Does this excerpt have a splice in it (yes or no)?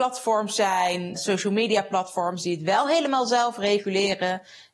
yes